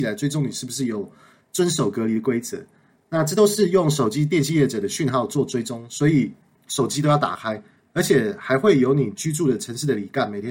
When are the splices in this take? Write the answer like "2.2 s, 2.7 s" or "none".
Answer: none